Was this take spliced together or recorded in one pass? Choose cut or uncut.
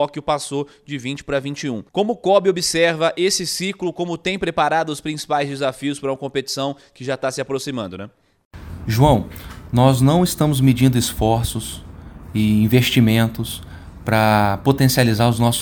cut